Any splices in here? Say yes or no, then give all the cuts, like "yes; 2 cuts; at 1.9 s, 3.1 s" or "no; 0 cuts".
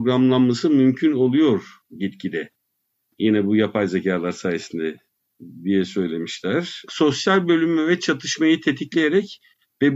yes; 1 cut; at 6.9 s